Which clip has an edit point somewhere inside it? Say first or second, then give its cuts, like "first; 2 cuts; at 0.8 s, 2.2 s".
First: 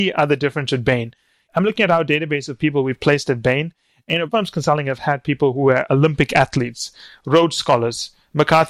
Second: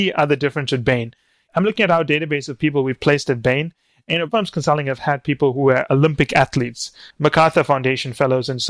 second; 1 cut; at 7.1 s